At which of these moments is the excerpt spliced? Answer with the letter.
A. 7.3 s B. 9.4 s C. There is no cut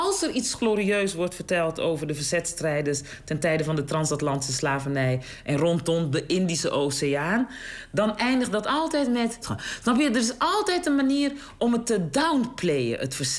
B